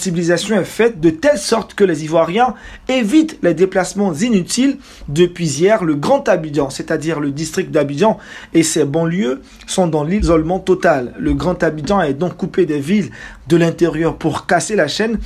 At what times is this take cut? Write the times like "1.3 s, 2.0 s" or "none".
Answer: 5.0 s